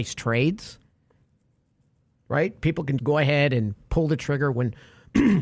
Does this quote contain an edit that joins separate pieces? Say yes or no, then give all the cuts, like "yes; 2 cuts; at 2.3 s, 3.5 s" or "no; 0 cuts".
yes; 1 cut; at 3.0 s